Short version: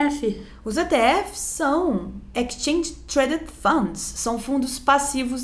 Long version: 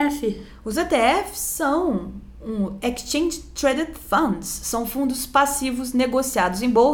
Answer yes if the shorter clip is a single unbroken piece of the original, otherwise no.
no